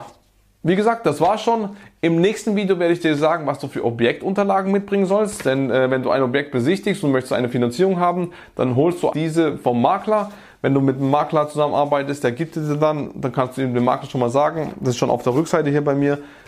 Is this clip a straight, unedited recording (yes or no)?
no